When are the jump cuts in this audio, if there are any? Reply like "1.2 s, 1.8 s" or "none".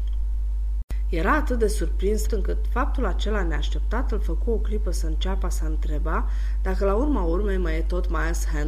2.3 s